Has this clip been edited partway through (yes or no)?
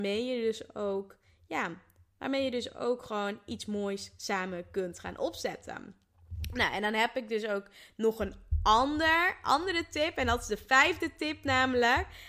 no